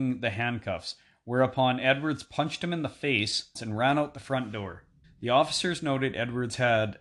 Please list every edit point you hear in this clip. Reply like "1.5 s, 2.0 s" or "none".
3.6 s, 5.0 s